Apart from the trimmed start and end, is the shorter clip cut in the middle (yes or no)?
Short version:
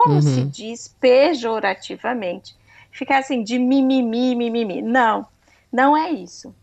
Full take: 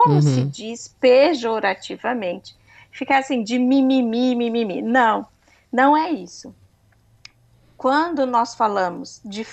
no